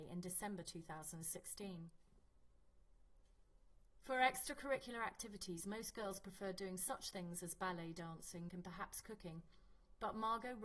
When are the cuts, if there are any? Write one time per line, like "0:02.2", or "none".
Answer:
0:08.5